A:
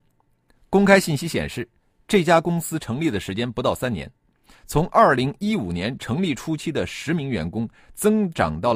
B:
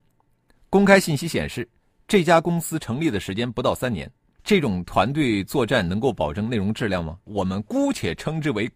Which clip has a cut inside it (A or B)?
B